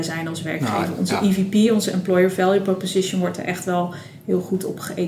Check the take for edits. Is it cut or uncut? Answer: uncut